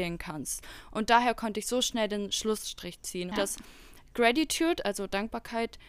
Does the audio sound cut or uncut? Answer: cut